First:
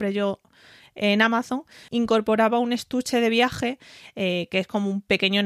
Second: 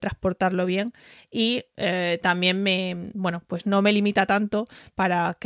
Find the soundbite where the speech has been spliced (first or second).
first